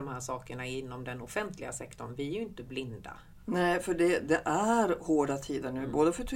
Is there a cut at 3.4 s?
yes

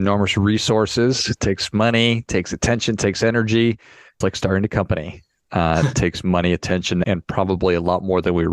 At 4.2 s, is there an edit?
yes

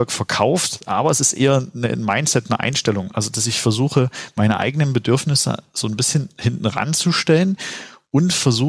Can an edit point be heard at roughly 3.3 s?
no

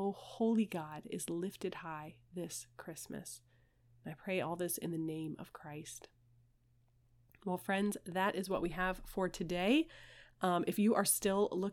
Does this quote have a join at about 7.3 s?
no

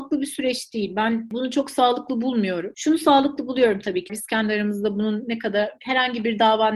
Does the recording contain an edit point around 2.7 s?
no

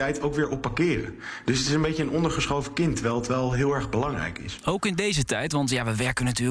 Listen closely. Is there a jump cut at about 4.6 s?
no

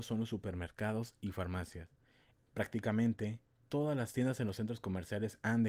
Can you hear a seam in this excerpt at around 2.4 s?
yes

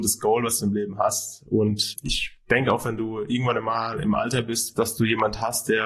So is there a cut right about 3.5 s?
no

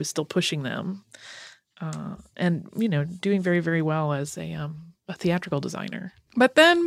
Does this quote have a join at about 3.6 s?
no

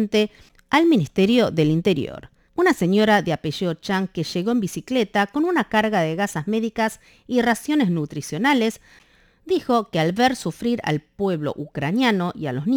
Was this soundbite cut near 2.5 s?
yes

